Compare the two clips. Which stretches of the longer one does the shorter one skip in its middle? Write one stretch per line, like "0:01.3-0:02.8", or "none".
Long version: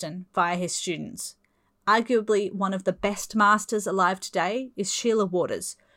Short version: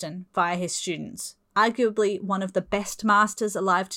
0:01.4-0:01.7